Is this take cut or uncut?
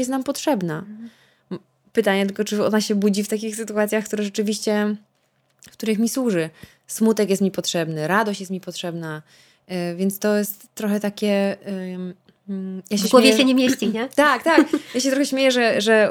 uncut